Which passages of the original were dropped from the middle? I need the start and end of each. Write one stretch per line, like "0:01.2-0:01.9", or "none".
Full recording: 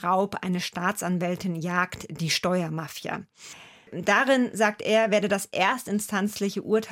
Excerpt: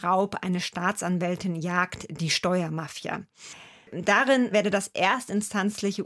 0:04.5-0:05.1